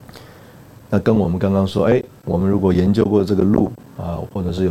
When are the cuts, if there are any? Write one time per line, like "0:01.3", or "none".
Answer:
none